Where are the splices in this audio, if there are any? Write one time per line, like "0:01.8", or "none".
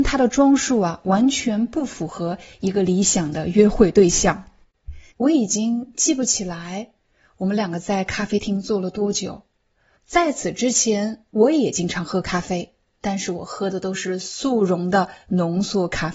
0:05.1
0:09.9
0:11.3